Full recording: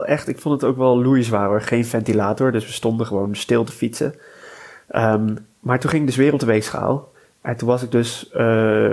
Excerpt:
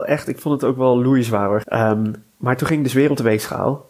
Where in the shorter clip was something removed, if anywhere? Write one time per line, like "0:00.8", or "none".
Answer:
0:01.6